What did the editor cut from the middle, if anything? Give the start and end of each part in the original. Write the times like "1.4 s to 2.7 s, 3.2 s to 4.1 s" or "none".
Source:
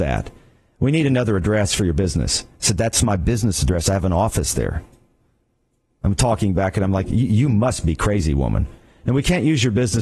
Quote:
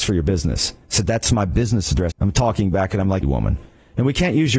3.8 s to 5.9 s, 7.1 s to 8.3 s